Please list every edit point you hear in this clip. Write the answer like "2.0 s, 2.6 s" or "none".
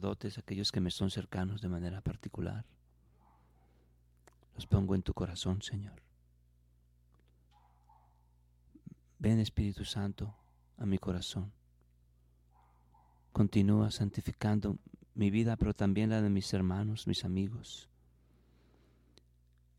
none